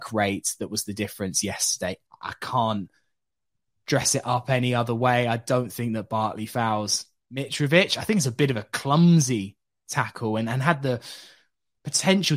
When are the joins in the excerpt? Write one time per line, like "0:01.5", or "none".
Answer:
0:02.1